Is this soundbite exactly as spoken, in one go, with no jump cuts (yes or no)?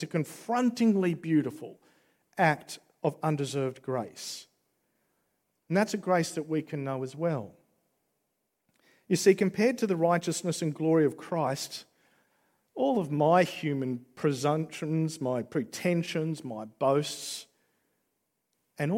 yes